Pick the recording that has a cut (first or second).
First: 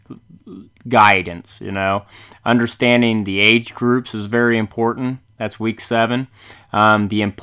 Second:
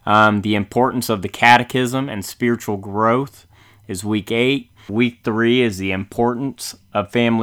second